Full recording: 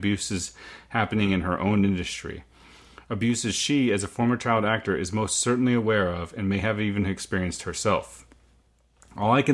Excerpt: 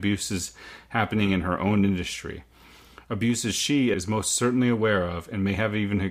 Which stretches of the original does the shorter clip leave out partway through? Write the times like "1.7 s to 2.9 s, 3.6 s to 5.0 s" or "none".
3.9 s to 5.0 s